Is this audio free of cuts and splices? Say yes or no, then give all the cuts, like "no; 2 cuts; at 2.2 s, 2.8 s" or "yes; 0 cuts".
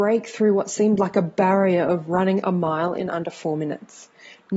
yes; 0 cuts